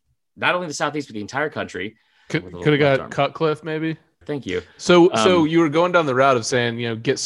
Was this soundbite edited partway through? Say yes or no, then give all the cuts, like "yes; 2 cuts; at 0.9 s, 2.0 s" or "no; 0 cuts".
yes; 2 cuts; at 2.3 s, 4.2 s